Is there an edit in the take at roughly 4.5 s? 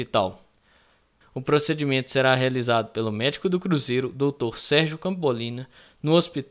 no; 1 cut; at 1.2 s

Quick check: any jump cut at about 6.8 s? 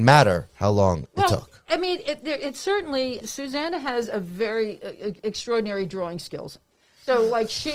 no; 1 cut; at 3.2 s

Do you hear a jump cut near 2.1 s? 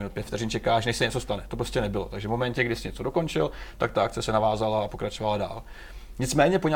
no; 0 cuts

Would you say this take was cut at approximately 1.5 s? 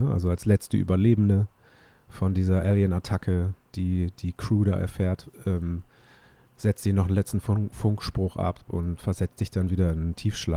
no; 0 cuts

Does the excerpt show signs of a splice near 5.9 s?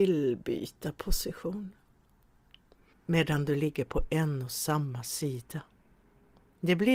no; 1 cut; at 2.9 s

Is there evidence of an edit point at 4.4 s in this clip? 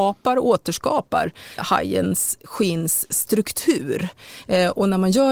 no; 1 cut; at 1.6 s

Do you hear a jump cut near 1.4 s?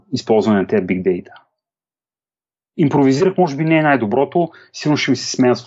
no; 0 cuts

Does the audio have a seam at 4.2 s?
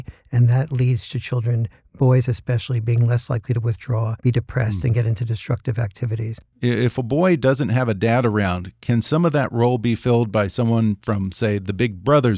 yes; 2 cuts; at 4.2 s, 6.5 s

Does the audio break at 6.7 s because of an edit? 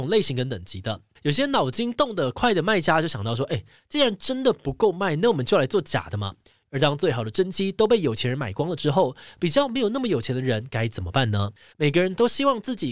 yes; 3 cuts; at 1.2 s, 6.7 s, 11.7 s

